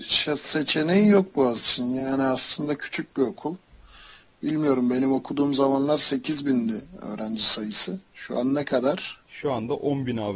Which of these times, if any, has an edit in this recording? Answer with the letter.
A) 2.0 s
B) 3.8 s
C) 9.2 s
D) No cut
D